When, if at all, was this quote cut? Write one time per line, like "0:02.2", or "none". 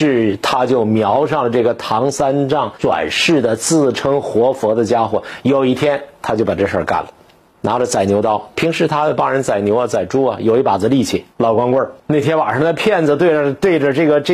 0:12.0

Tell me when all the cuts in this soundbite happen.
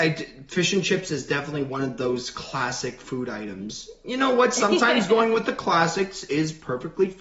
none

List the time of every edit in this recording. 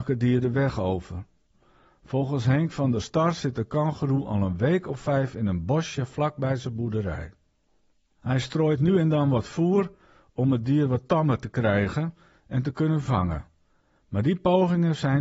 none

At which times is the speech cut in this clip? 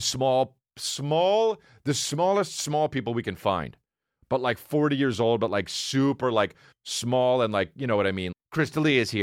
0:06.7
0:08.3

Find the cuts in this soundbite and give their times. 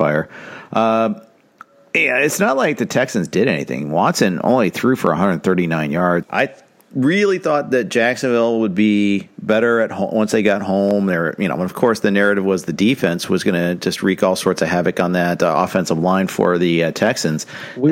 0:06.2

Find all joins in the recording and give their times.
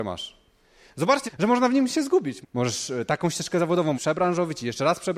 0:01.3
0:02.4
0:03.9

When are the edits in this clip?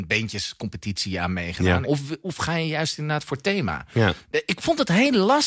0:01.8
0:04.2

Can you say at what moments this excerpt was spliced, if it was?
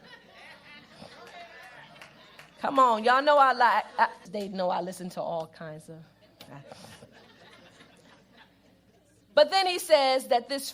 0:04.3

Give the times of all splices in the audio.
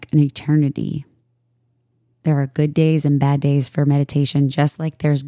0:02.1

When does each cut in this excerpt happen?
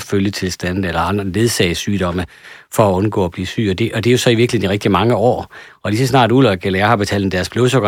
none

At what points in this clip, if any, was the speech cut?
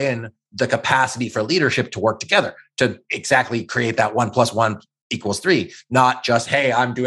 none

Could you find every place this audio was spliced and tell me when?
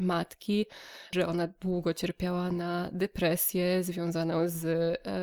0:01.1

